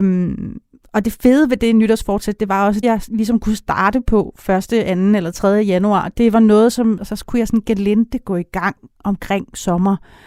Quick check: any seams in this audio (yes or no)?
yes